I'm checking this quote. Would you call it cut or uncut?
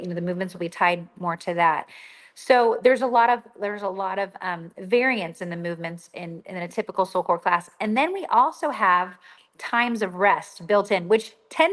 uncut